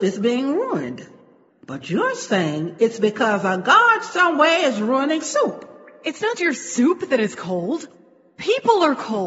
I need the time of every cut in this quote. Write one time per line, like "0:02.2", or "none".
0:01.5
0:06.4